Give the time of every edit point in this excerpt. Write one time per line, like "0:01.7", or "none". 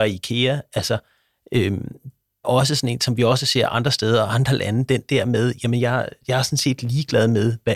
0:02.4